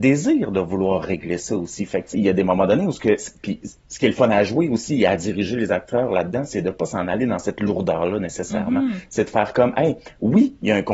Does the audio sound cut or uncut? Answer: cut